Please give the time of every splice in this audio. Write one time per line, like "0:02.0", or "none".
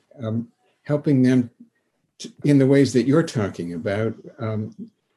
0:02.4